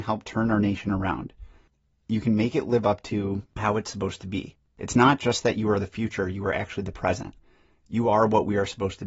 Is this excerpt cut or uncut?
uncut